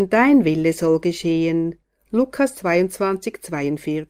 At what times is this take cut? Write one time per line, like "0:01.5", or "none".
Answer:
none